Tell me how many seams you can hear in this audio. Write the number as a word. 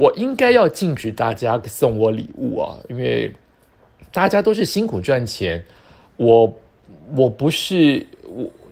zero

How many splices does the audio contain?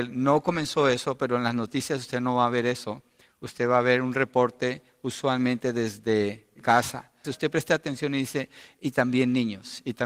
one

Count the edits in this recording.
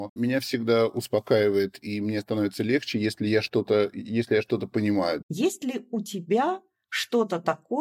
one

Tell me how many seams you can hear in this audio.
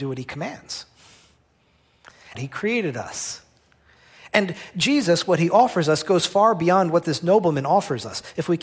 one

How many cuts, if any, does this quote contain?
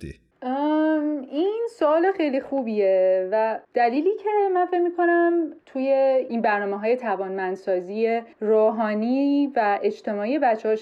one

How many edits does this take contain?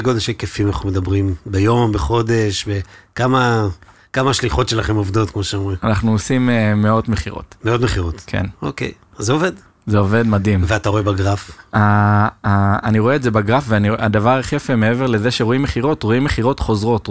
zero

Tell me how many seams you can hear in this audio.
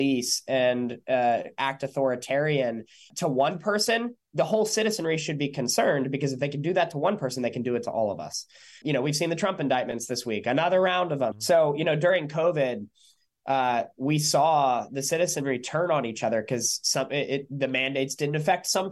one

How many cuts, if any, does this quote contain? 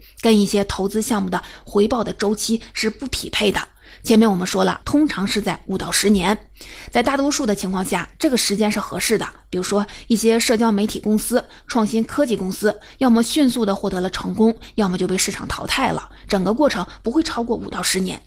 one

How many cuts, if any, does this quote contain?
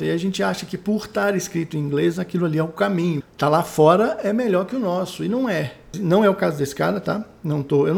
two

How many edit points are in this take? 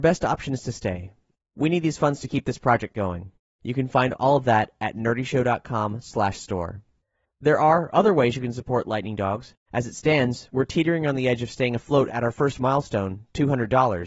three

